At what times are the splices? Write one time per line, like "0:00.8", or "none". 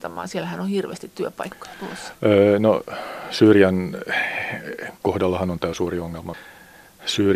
none